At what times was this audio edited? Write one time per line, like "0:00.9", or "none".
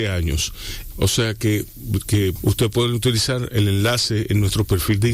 0:00.9
0:02.4